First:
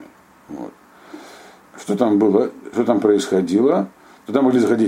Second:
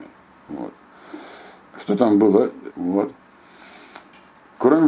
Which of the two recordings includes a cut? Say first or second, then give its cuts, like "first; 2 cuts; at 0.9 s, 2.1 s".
second; 1 cut; at 2.7 s